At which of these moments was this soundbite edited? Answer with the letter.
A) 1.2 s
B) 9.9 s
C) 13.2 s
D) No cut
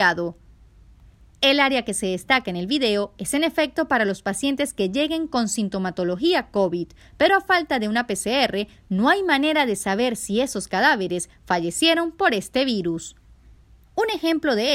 D